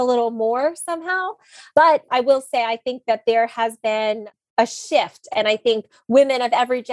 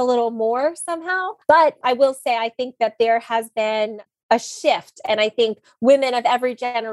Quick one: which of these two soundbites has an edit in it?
second; 1 cut; at 1.4 s

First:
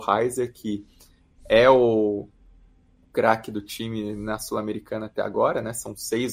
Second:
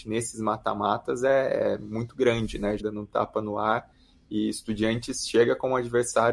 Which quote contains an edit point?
second; 1 cut; at 2.8 s

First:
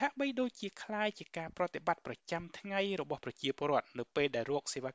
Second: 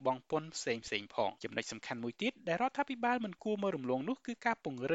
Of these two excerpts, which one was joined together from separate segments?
second; 1 cut; at 1.4 s

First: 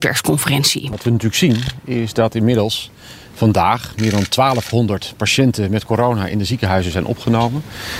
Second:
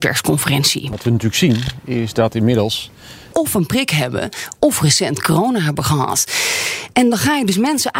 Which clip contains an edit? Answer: second; 1 cut; at 3.3 s

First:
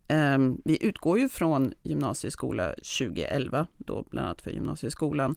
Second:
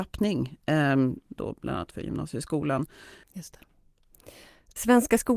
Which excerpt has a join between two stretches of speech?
second; 2 cuts; at 1.2 s, 3.2 s

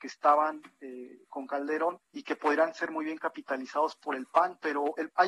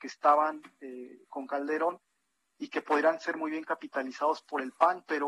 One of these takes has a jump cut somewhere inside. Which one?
first; 1 cut; at 2.0 s

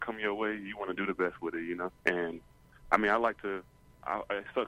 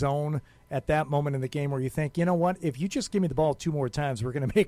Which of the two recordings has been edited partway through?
first; 1 cut; at 2.0 s

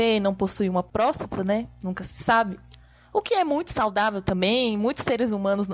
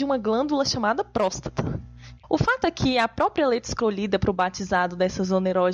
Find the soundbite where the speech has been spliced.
second; 1 cut; at 2.2 s

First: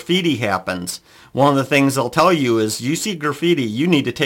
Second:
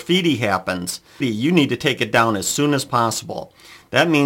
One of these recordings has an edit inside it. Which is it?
second; 1 cut; at 1.2 s

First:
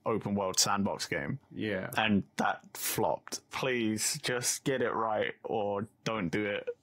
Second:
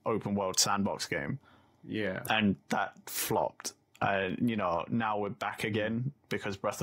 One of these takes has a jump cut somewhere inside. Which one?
first; 2 cuts; at 1.4 s, 3.5 s

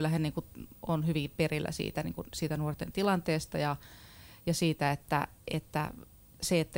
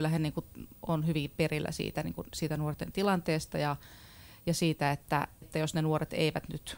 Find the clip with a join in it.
second; 1 cut; at 5.4 s

